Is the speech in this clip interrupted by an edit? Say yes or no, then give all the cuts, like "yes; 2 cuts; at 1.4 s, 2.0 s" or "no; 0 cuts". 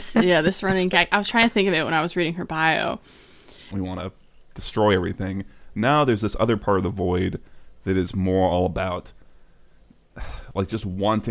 yes; 1 cut; at 3.7 s